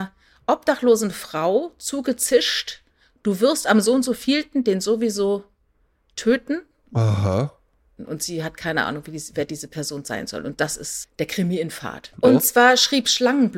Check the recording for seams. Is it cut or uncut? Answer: cut